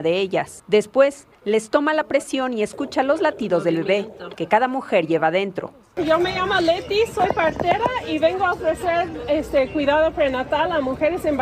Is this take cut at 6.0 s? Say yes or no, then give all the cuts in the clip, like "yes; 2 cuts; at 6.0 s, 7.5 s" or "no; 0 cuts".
no; 0 cuts